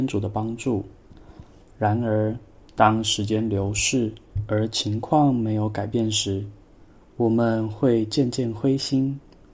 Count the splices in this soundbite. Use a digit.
0